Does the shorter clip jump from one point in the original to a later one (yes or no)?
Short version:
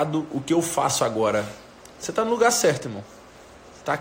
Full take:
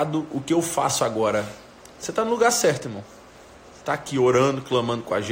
no